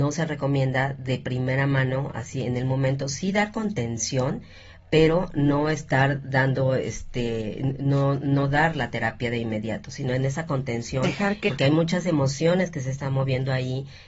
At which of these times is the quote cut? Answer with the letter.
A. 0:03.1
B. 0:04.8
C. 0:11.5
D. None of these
C